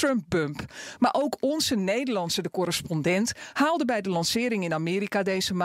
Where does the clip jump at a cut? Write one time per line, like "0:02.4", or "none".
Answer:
none